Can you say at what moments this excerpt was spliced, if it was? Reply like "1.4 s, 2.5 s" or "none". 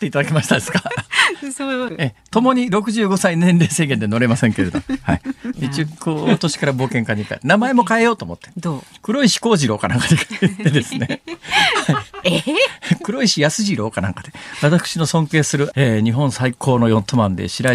1.9 s, 5.5 s, 15.7 s